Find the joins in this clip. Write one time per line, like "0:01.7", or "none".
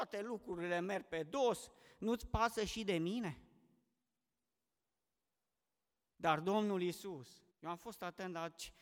0:07.5